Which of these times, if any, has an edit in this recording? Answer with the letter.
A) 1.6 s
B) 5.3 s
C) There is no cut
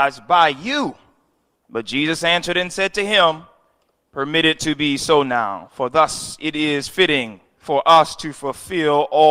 A